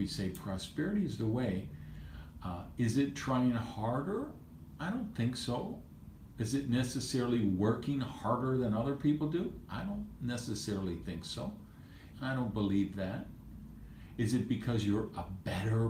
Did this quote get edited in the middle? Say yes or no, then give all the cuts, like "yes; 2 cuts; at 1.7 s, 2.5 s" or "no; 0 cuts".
yes; 1 cut; at 12.1 s